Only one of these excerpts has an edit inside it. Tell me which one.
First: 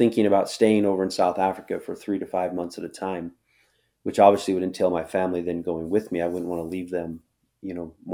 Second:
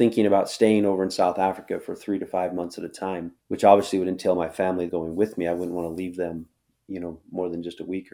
second; 2 cuts; at 3.4 s, 4.9 s

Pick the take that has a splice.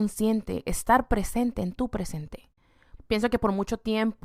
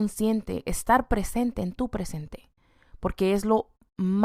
first; 1 cut; at 3.0 s

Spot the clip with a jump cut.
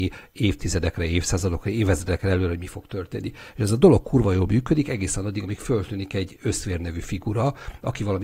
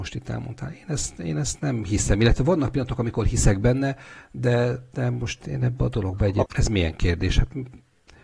second; 1 cut; at 6.5 s

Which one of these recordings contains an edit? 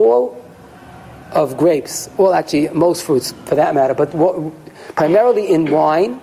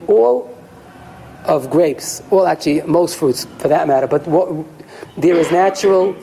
second; 1 cut; at 5.0 s

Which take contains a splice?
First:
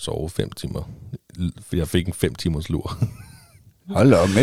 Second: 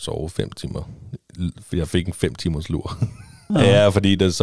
second; 1 cut; at 3.5 s

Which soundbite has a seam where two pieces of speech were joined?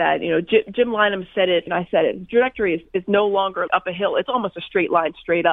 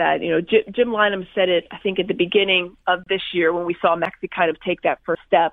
first; 2 cuts; at 1.7 s, 3.7 s

